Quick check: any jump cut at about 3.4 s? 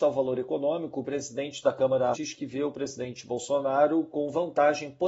no; 1 cut; at 2.1 s

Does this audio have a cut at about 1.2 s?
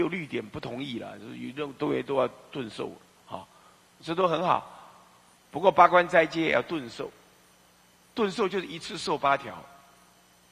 no; 1 cut; at 5.4 s

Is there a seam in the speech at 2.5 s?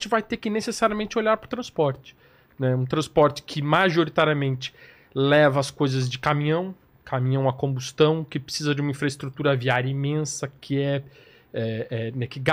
no; 0 cuts

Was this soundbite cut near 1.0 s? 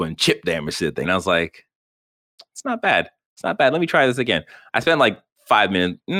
yes; 1 cut; at 1.0 s

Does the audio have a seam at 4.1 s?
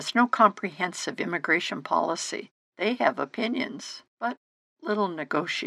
yes; 2 cuts; at 2.6 s, 4.1 s

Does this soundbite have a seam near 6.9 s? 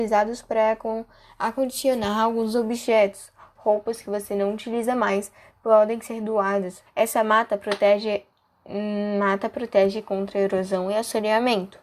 yes; 1 cut; at 6.9 s

